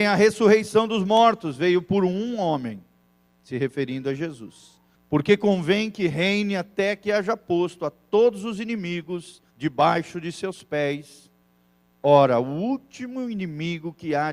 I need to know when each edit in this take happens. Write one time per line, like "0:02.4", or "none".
0:05.0
0:09.5